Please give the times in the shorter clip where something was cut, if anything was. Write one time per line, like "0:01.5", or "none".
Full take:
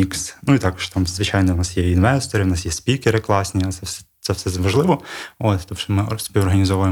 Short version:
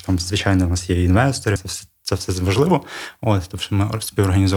0:01.6

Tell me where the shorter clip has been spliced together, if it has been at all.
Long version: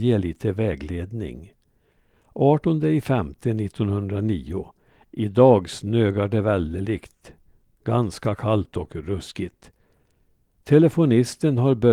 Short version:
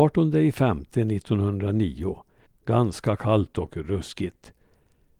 0:02.5

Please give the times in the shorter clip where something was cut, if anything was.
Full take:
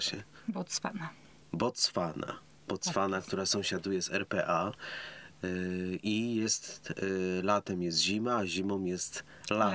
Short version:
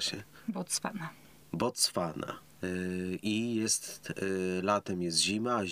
0:02.6

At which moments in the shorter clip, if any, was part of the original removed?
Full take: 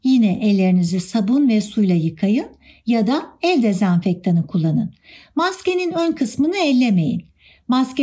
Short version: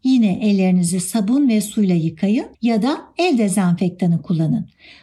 0:02.5

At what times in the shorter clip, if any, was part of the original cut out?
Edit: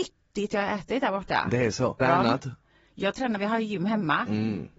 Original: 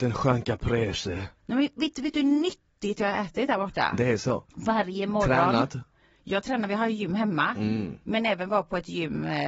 0:02.0

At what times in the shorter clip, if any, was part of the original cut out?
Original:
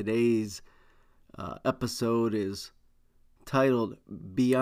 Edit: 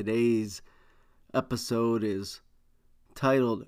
0:01.3

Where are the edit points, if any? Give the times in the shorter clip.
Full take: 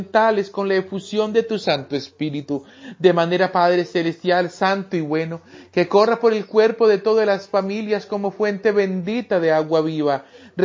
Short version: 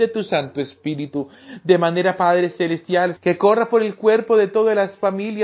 0:03.2

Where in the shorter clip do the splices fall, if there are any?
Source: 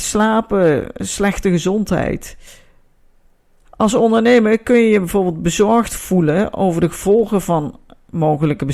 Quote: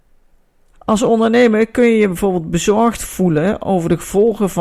none

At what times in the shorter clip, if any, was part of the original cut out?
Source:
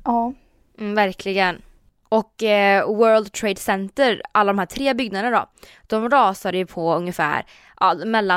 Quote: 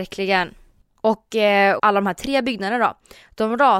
0:01.8

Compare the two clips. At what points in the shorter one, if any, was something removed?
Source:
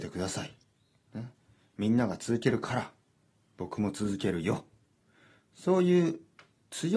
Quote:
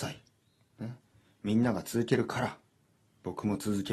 none

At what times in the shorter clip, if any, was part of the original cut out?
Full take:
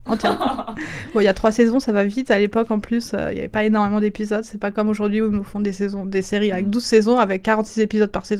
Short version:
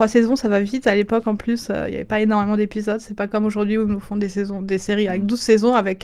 none

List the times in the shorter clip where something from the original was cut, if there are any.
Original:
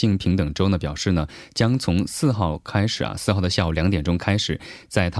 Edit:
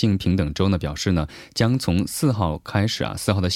none

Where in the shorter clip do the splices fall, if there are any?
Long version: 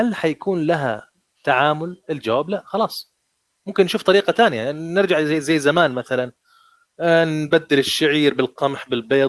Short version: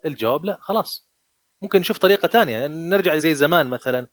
0:03.2

